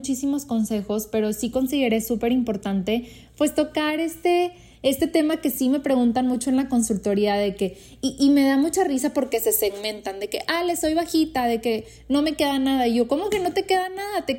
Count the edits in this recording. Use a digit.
0